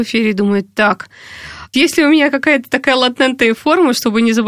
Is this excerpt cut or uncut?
cut